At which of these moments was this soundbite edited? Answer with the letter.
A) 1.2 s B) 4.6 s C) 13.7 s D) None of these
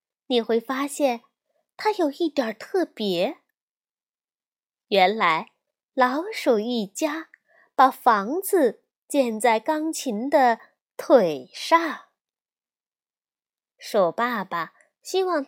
C